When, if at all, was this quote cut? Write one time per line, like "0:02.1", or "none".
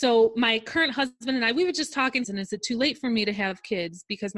0:02.2